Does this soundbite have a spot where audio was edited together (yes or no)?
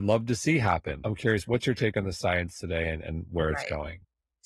no